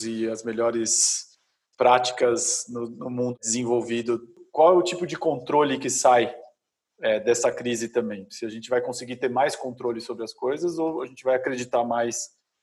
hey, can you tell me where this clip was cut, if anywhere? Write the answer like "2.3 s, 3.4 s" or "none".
none